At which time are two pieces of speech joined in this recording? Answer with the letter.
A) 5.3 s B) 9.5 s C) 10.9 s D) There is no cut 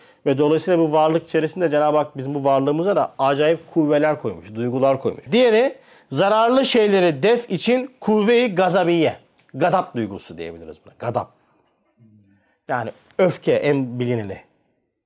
A